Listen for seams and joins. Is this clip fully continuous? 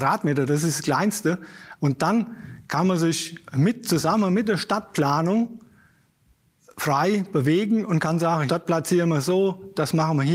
no; 2 cuts; at 1.8 s, 8.5 s

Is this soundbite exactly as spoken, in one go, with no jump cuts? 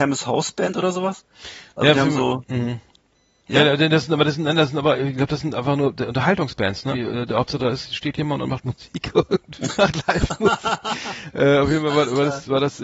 no; 2 cuts; at 6.9 s, 9.8 s

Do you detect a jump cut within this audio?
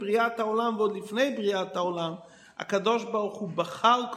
no; 0 cuts

